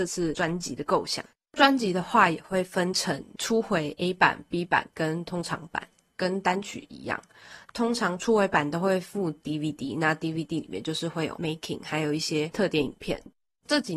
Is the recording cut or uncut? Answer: uncut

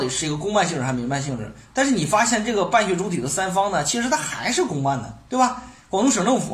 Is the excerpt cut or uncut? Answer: uncut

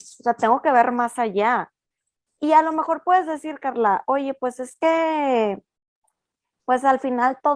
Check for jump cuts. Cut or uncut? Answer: uncut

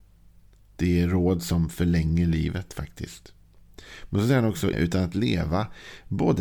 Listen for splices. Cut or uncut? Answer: cut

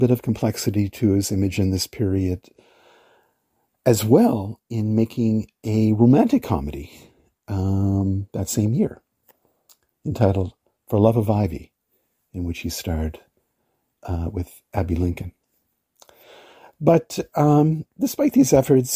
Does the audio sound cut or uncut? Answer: uncut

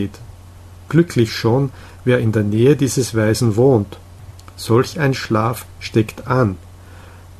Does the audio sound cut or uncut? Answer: uncut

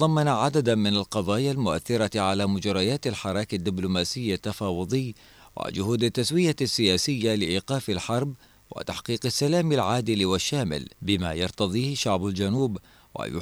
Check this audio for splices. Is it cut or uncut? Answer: cut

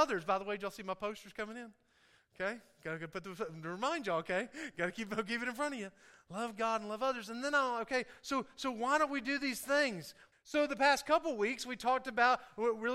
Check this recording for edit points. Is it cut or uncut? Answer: cut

